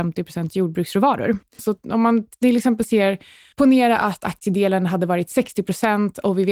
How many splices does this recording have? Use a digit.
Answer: 1